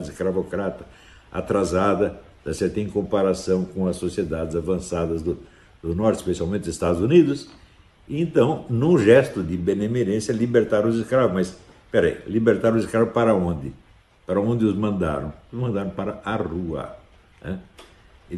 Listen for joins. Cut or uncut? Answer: uncut